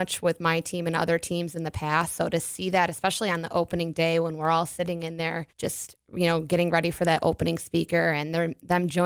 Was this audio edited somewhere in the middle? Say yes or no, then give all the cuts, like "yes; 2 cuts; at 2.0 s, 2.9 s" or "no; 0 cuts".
yes; 1 cut; at 5.5 s